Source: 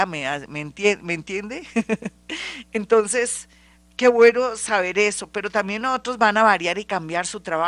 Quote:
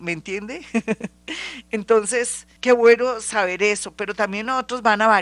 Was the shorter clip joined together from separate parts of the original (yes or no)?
yes